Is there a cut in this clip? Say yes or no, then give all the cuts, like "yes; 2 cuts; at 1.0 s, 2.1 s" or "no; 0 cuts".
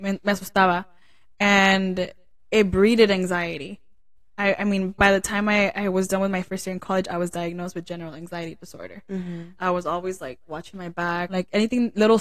yes; 2 cuts; at 9.6 s, 11.3 s